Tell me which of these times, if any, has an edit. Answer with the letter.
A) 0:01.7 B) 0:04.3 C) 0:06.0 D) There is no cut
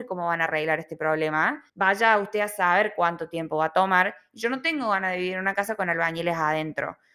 A